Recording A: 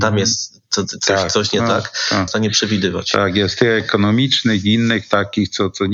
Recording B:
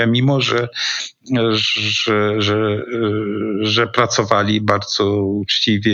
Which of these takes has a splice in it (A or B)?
A